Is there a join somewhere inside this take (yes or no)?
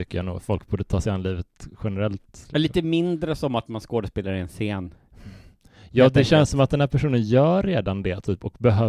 no